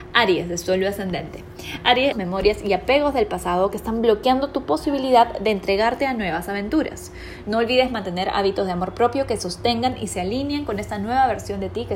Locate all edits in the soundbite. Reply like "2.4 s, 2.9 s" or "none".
2.1 s, 7.4 s